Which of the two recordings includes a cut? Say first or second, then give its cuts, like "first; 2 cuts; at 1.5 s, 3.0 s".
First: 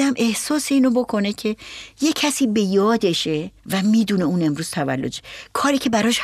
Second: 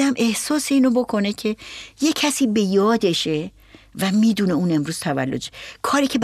first; 1 cut; at 3.6 s